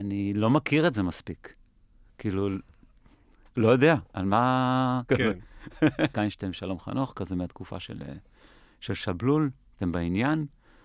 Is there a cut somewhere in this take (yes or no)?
yes